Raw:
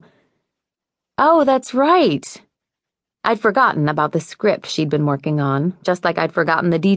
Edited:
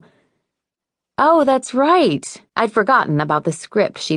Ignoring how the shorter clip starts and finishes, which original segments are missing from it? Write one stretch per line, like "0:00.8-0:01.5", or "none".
0:02.5-0:03.2